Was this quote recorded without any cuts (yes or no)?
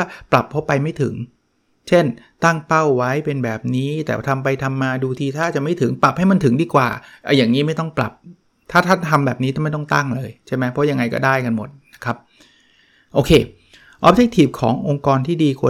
yes